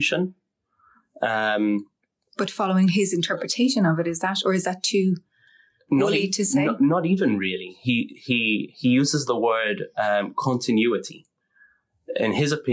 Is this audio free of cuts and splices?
yes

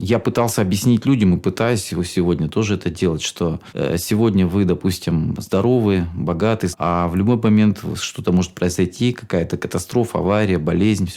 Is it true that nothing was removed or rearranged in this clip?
no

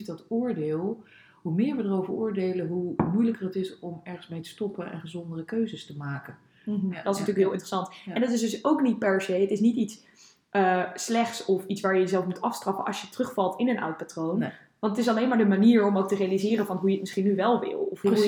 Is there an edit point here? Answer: yes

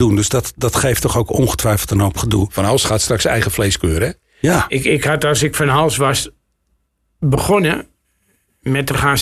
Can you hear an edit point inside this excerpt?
no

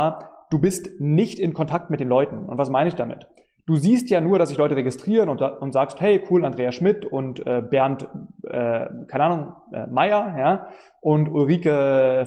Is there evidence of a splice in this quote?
no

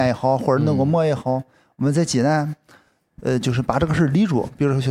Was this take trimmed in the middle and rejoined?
no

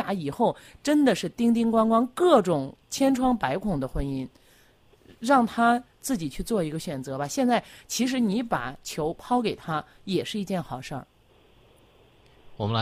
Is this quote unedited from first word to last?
yes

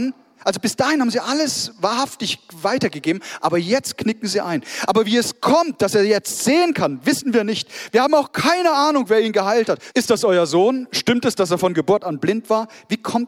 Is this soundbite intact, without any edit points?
no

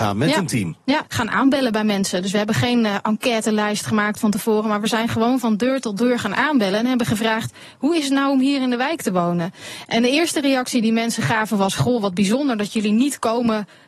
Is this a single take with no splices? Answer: no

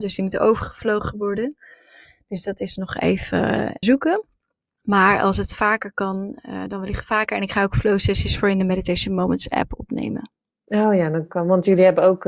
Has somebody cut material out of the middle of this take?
yes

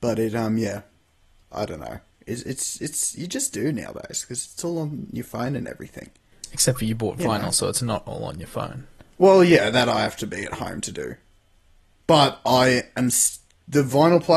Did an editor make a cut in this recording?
no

